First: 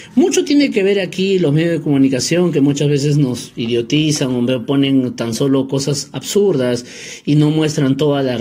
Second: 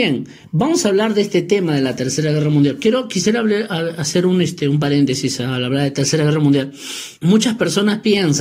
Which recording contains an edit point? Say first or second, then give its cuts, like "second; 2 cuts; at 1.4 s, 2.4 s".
second; 1 cut; at 7.2 s